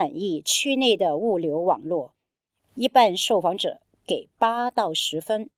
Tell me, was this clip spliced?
no; 0 cuts

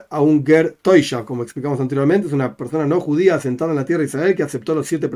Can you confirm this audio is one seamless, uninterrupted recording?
yes; 0 cuts

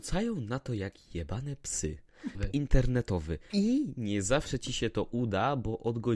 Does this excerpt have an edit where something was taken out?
yes; 2 cuts; at 2.3 s, 3.5 s

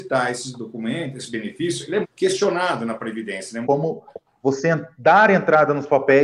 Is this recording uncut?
no; 2 cuts; at 2.0 s, 3.6 s

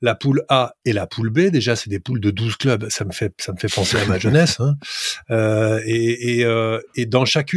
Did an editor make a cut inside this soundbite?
no; 0 cuts

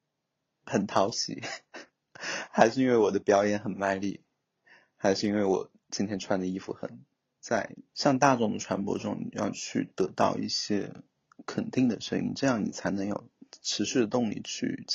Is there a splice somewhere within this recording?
yes; 1 cut; at 7.4 s

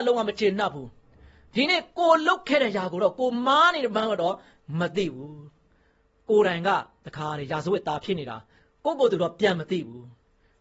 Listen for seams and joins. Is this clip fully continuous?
yes; 0 cuts

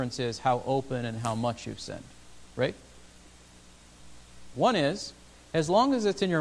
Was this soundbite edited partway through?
yes; 1 cut; at 4.5 s

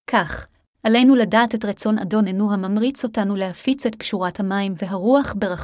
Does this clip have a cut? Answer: no; 0 cuts

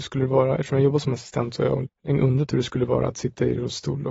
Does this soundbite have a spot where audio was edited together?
yes; 1 cut; at 1.8 s

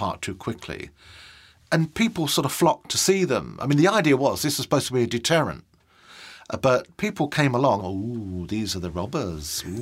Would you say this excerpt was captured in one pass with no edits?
no; 1 cut; at 7.8 s

